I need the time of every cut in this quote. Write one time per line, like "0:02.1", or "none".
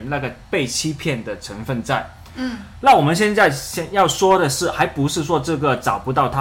none